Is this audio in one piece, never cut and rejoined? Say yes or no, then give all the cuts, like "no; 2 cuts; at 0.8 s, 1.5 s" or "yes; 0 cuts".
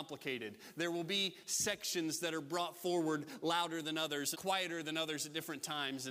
no; 1 cut; at 4.3 s